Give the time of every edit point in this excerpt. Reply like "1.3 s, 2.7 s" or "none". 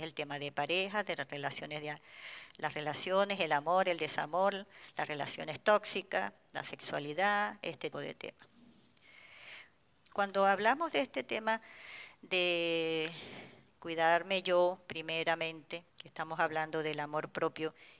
7.9 s, 10.0 s, 15.9 s